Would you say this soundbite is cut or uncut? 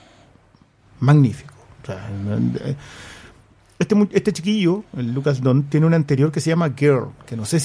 uncut